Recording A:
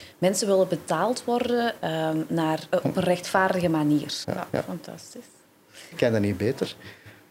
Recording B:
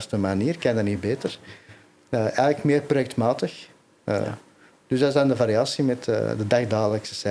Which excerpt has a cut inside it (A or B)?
A